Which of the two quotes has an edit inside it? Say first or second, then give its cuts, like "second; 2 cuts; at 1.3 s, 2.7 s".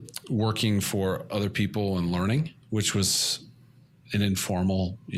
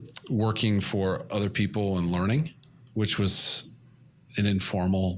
first; 1 cut; at 2.6 s